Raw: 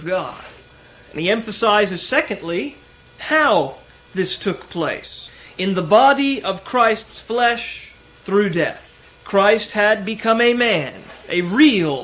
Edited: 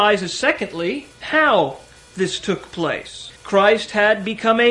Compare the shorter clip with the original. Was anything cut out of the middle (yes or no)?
yes